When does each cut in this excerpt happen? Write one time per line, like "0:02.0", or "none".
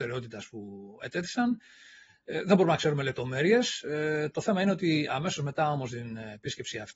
none